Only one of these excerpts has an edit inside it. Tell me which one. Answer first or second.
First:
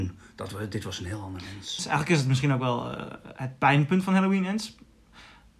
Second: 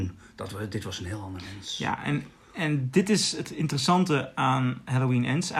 first